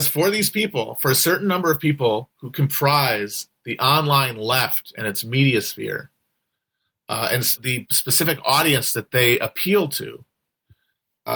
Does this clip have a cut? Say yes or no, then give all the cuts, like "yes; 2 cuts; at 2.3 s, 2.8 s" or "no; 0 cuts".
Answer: yes; 1 cut; at 7.6 s